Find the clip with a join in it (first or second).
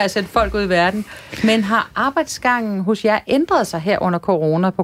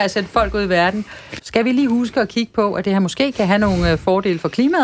second